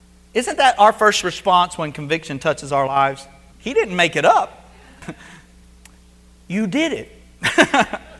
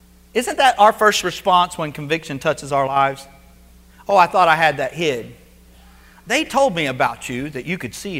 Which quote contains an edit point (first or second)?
first